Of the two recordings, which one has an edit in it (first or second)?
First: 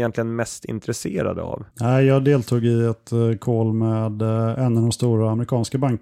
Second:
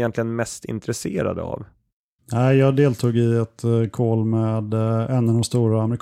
first